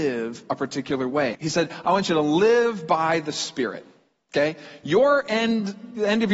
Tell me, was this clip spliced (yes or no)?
yes